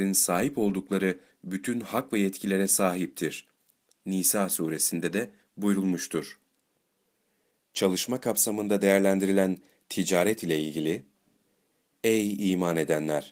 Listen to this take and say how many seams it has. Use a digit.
1